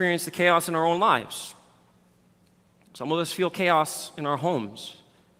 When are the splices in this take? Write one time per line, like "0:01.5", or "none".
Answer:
none

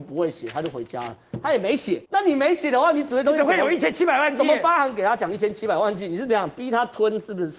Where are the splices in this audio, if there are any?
0:02.1

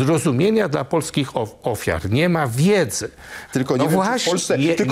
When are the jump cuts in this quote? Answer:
0:03.5

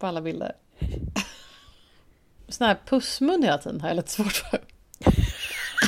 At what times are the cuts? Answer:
0:02.4

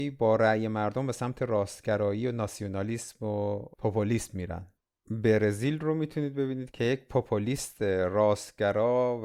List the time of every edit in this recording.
none

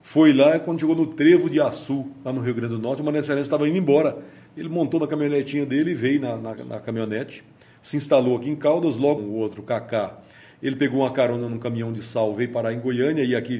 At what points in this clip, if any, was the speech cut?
0:09.2

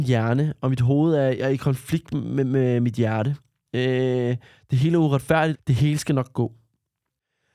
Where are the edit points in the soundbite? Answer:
0:03.7
0:05.5

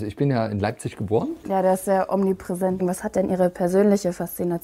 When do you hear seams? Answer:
0:01.4
0:02.8

